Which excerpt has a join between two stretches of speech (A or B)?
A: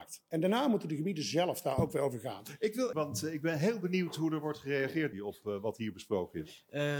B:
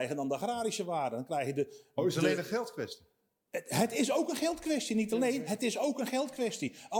A